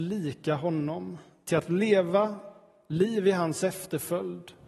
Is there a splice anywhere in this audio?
no; 0 cuts

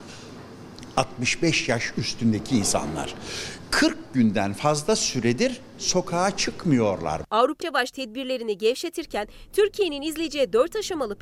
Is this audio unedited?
no; 1 cut; at 7.6 s

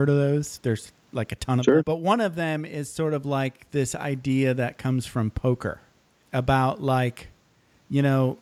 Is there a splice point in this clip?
yes; 2 cuts; at 1.8 s, 6.2 s

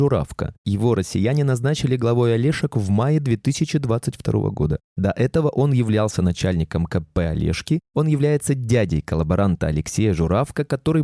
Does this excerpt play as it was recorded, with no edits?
yes; 0 cuts

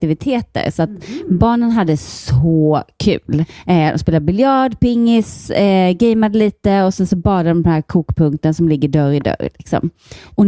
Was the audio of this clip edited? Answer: no; 0 cuts

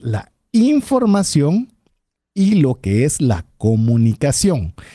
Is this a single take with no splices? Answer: yes; 0 cuts

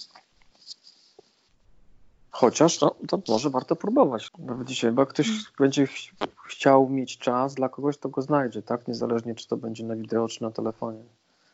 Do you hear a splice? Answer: yes; 1 cut; at 4.3 s

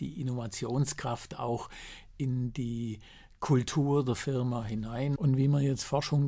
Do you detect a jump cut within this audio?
yes; 1 cut; at 5.2 s

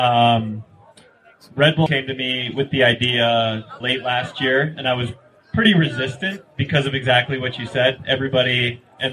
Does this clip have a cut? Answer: yes; 2 cuts; at 1.9 s, 3.8 s

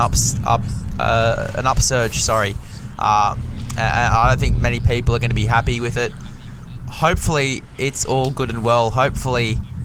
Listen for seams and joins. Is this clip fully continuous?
yes; 0 cuts

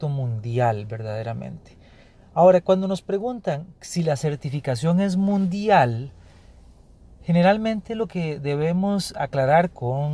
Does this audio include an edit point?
no; 0 cuts

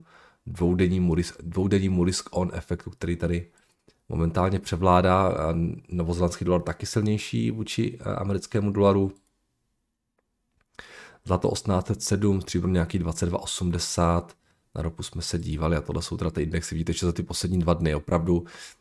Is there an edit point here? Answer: no; 0 cuts

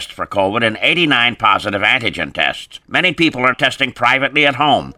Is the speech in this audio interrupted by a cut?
yes; 1 cut; at 3.5 s

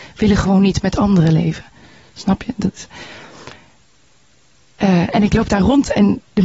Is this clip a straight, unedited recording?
yes; 0 cuts

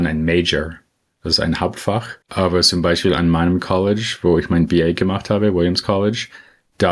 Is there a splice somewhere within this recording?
yes; 1 cut; at 2.2 s

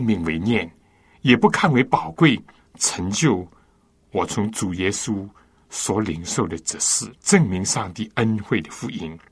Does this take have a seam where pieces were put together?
yes; 2 cuts; at 2.6 s, 7.1 s

